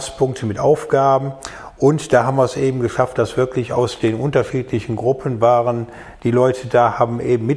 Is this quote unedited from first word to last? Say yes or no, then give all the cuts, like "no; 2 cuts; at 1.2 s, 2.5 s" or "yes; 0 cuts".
yes; 0 cuts